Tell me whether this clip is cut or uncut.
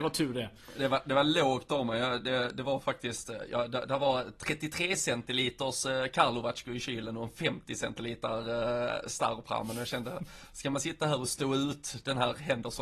uncut